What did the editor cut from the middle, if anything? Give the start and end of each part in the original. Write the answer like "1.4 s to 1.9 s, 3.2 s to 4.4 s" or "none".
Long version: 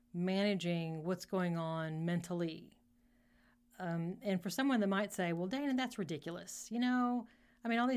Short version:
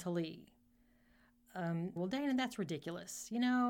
4.2 s to 5.4 s